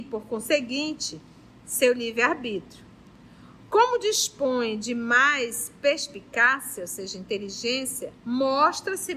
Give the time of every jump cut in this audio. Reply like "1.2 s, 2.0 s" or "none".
8.2 s